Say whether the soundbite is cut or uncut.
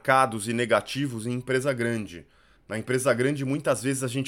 cut